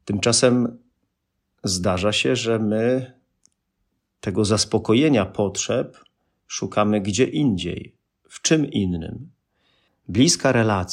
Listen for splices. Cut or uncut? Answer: cut